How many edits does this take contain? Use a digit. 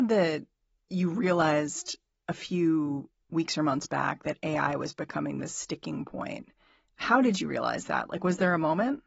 0